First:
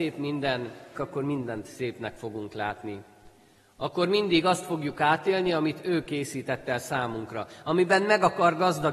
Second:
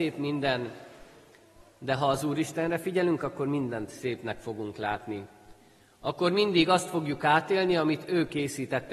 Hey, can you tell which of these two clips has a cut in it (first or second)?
first